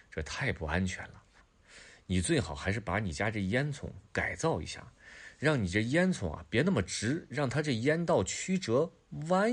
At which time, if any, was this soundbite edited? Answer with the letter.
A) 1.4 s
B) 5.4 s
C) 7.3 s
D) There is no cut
A